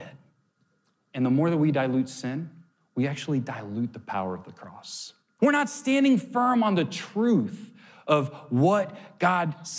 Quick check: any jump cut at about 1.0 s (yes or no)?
no